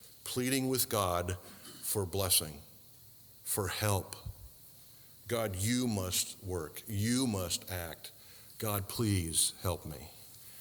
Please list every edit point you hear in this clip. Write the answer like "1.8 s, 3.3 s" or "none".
none